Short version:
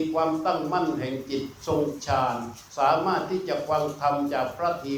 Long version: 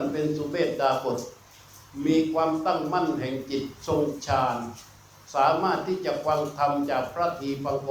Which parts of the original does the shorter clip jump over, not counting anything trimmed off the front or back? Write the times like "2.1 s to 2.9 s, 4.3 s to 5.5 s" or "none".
4.9 s to 5.3 s